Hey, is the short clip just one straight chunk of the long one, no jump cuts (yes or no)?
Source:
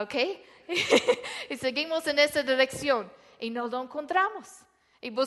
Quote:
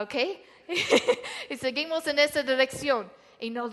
yes